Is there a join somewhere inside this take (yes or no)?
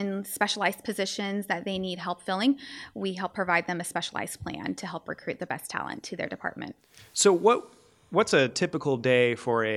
no